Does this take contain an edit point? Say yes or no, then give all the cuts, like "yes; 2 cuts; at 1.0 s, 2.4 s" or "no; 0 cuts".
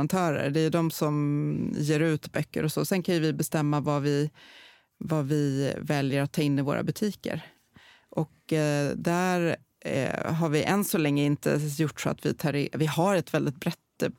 no; 0 cuts